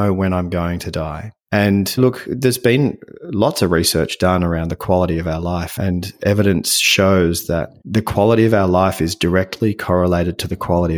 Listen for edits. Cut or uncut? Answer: uncut